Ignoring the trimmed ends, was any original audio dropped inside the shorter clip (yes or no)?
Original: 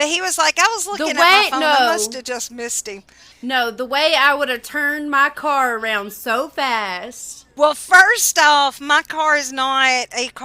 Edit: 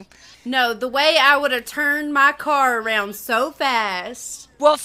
no